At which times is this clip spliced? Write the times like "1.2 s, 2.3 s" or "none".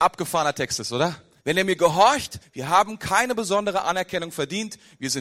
1.4 s, 2.4 s